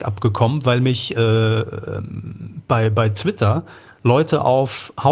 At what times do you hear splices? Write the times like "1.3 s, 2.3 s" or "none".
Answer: none